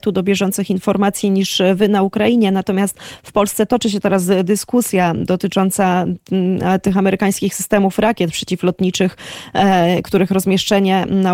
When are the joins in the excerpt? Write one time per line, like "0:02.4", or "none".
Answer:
none